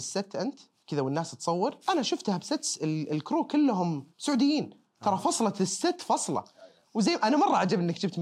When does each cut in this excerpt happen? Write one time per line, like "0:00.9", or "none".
0:01.8
0:04.1